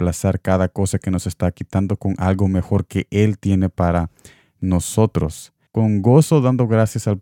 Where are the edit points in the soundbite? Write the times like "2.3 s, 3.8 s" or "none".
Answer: 5.7 s